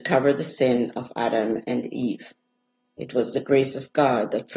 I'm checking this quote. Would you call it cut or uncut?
cut